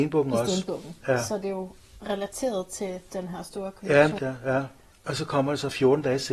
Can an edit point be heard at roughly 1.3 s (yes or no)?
no